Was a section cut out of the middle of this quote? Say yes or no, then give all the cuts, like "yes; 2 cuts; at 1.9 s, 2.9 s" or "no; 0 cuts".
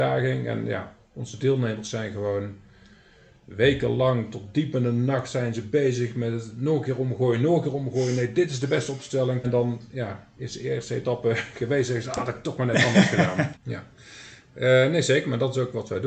yes; 2 cuts; at 9.4 s, 13.5 s